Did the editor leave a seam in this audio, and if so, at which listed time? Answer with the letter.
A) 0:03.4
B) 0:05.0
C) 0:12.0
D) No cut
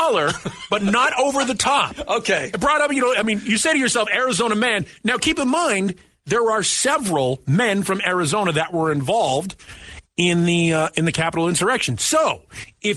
D